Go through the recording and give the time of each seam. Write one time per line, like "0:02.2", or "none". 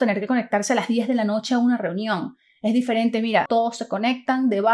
0:03.5